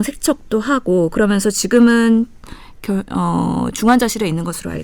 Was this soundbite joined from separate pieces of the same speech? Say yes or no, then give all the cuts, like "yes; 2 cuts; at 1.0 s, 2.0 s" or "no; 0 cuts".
no; 0 cuts